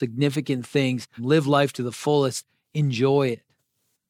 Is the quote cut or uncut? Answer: cut